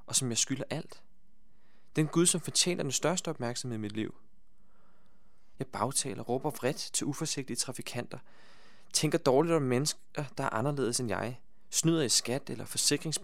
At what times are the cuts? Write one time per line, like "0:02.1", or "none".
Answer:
0:05.5

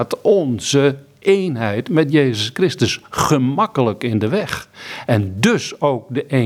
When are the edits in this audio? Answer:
none

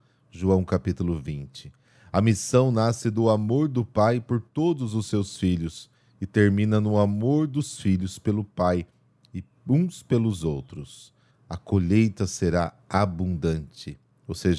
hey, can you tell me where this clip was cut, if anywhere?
0:11.3

